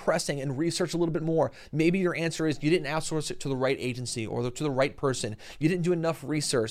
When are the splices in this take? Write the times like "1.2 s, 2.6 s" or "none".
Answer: none